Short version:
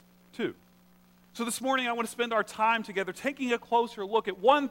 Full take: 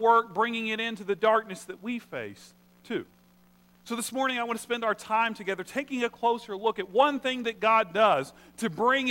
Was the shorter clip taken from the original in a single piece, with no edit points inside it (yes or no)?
yes